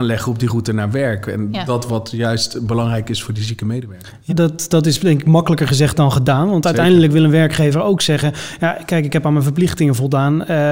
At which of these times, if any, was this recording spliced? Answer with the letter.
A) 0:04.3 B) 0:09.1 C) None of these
A